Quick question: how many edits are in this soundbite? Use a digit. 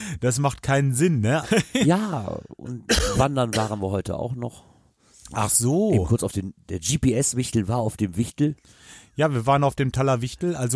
1